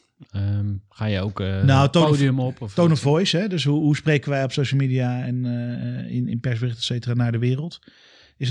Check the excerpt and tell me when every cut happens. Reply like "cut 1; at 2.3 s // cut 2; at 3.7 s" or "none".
none